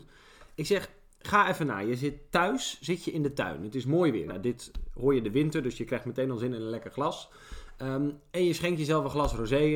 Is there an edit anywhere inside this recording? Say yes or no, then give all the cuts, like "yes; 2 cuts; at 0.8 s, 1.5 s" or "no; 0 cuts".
yes; 1 cut; at 4.3 s